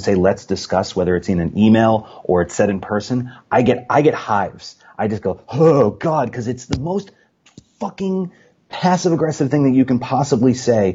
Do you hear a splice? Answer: no; 0 cuts

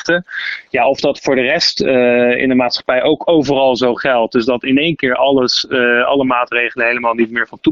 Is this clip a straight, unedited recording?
yes; 0 cuts

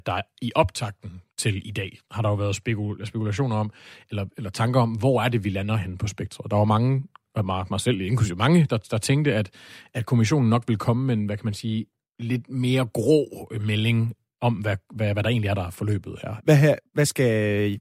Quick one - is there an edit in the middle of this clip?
yes; 1 cut; at 16.4 s

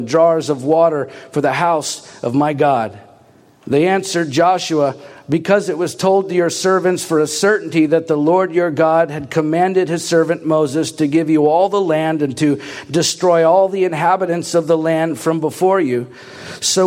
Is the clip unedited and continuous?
yes; 0 cuts

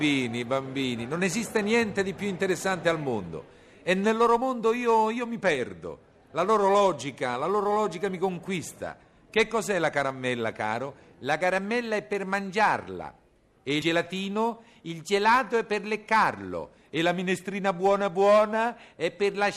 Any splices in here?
no; 0 cuts

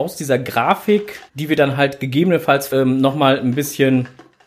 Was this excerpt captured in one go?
no; 2 cuts; at 1.3 s, 2.7 s

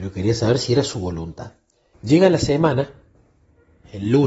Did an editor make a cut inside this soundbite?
yes; 1 cut; at 1.9 s

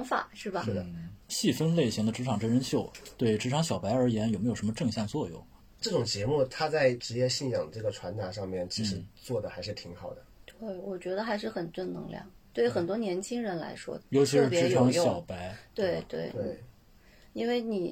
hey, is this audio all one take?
yes; 0 cuts

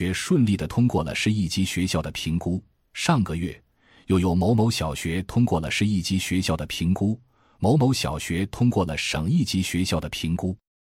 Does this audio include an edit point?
no; 0 cuts

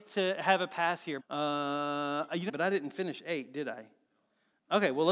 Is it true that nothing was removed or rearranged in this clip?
no; 2 cuts; at 1.2 s, 2.5 s

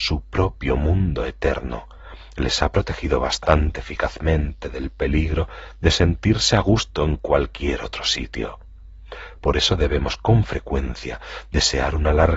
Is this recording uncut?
yes; 0 cuts

